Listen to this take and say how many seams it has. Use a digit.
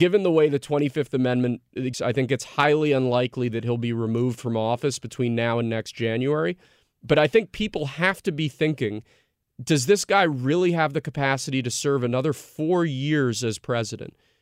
1